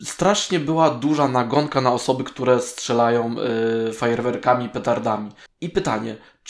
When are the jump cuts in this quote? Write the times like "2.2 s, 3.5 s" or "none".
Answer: 5.5 s